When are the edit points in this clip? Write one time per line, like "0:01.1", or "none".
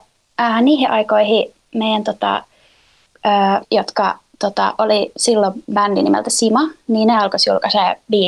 0:03.6